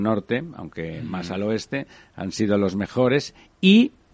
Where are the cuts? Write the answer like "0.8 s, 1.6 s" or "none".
none